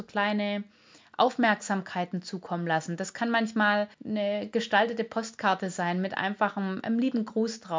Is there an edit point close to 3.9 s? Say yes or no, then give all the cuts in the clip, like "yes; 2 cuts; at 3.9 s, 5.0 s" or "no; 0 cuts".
yes; 1 cut; at 3.9 s